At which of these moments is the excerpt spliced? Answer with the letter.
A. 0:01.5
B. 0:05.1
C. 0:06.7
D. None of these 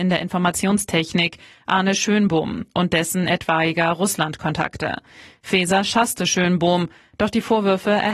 D